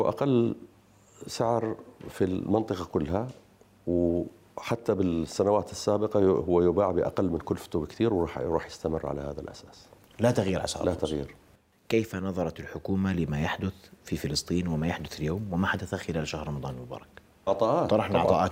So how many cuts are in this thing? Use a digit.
1